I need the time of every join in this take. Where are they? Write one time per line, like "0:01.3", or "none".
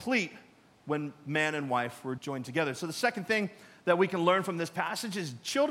0:02.2

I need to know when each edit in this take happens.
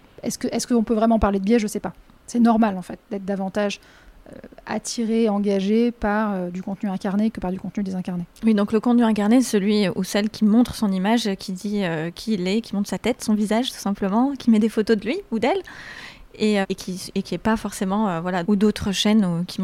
0:16.6
0:18.4

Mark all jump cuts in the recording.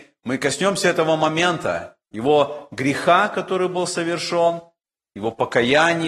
none

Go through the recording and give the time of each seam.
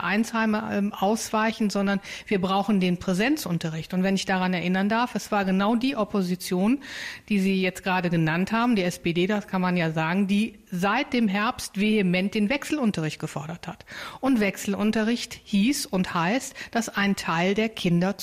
none

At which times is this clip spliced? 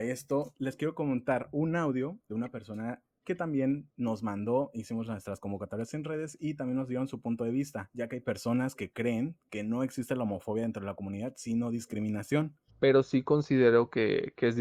0:12.7

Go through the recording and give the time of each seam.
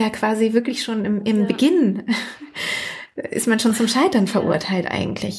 none

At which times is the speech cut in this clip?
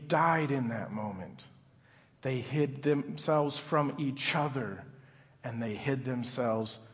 none

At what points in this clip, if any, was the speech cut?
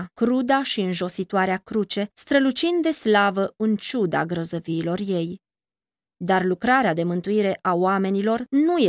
none

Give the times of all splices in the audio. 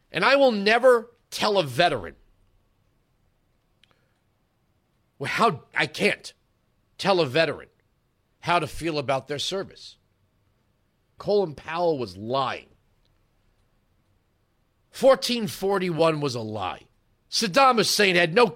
0:05.7
0:11.2

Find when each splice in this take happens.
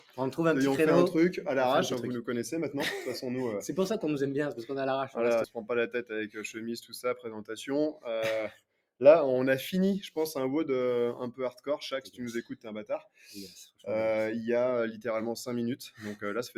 0:05.4

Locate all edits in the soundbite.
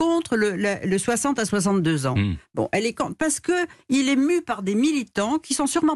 none

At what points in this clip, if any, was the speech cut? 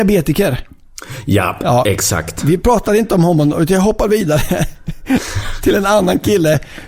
none

